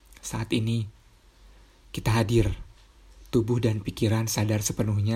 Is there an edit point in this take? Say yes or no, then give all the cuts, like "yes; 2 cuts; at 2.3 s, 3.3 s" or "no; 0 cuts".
no; 0 cuts